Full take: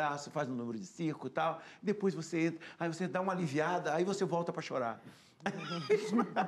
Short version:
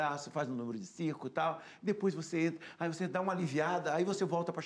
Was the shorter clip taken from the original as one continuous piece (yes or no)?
yes